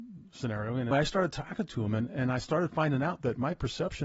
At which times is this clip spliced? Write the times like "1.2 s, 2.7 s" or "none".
0.9 s